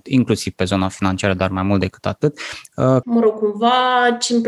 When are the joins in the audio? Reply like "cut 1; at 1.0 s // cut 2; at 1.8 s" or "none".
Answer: cut 1; at 3.0 s